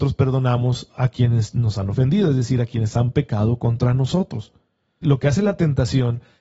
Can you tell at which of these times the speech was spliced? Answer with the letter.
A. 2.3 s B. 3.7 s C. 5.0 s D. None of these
C